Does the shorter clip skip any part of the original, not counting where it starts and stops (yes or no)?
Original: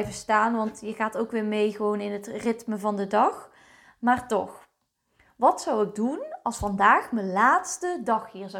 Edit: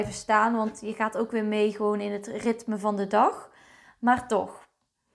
no